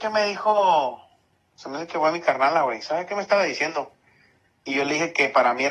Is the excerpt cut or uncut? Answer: uncut